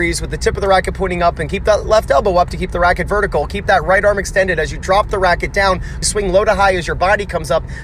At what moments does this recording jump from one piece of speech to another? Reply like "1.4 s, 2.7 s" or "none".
6.0 s

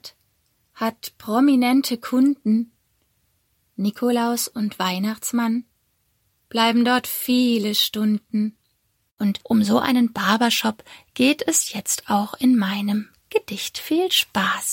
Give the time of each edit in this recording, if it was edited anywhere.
9.1 s

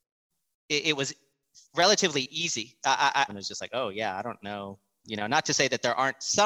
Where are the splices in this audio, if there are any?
3.3 s, 5.0 s

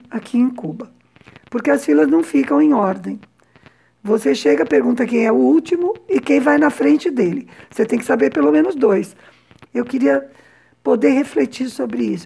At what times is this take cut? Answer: 9.7 s

